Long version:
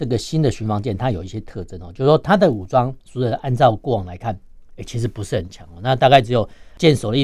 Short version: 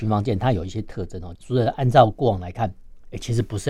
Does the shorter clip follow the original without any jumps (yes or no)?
no